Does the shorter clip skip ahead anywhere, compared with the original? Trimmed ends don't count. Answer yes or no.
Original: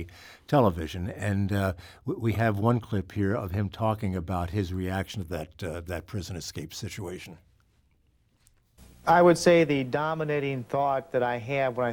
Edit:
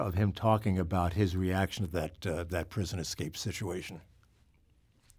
no